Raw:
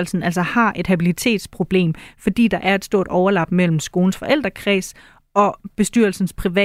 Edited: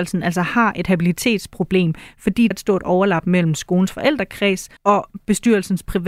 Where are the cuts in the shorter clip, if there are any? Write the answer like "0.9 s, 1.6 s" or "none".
2.5 s, 4.8 s